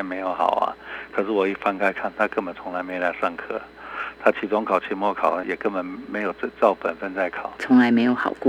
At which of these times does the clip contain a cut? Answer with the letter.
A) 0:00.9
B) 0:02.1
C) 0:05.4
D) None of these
C